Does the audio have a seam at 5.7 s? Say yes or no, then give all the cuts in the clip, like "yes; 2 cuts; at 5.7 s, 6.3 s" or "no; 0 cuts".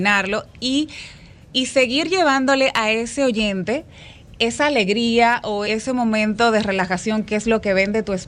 yes; 1 cut; at 5.7 s